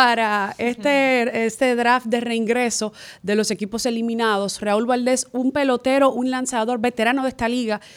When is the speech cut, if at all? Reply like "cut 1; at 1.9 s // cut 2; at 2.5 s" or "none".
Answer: none